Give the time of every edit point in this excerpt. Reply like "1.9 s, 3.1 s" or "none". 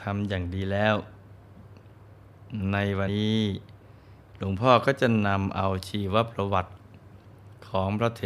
3.1 s